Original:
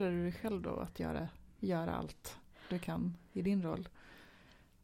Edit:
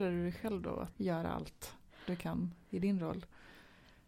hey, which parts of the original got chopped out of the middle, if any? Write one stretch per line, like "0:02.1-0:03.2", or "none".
0:00.9-0:01.6